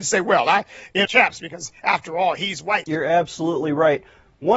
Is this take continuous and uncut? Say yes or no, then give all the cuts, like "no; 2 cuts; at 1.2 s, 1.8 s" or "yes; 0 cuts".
no; 2 cuts; at 1.0 s, 2.9 s